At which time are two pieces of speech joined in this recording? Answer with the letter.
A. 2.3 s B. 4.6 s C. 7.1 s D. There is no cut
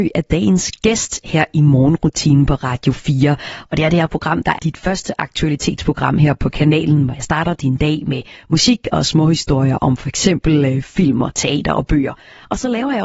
B